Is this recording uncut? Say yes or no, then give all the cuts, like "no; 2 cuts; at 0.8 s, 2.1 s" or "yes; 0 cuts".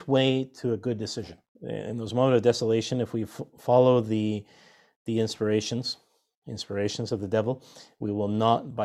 no; 1 cut; at 1.5 s